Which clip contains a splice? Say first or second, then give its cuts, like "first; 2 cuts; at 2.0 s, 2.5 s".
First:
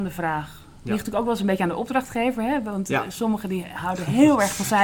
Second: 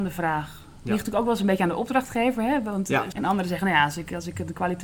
second; 1 cut; at 3.1 s